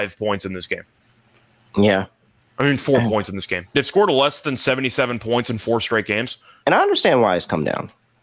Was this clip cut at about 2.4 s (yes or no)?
no